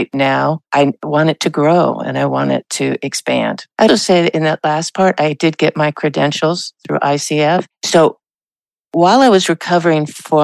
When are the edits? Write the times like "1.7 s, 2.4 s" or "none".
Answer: 3.9 s, 7.7 s